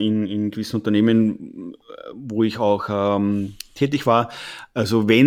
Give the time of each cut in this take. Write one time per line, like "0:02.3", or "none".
none